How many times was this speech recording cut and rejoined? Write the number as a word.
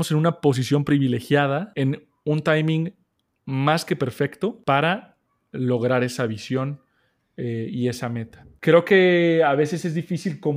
zero